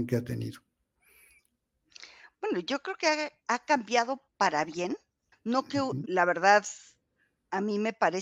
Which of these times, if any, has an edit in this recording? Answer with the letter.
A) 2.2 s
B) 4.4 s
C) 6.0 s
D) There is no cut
C